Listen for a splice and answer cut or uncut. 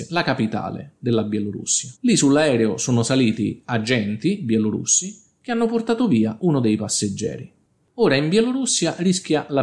cut